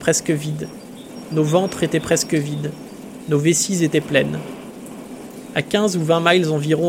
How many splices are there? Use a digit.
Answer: 0